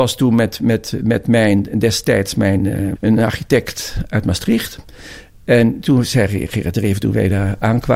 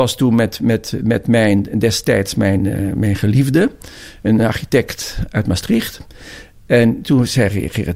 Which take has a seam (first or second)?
first